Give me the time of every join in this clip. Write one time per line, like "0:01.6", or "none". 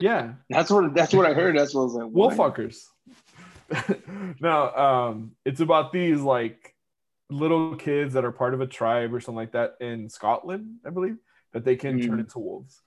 none